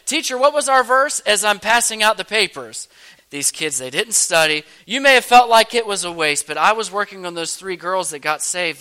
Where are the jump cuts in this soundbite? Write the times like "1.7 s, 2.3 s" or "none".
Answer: 3.2 s, 4.8 s